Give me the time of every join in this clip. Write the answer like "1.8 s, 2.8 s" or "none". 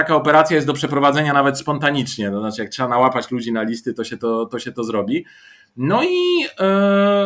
none